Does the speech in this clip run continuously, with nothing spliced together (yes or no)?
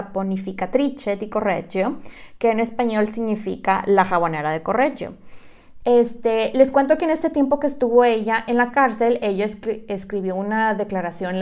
no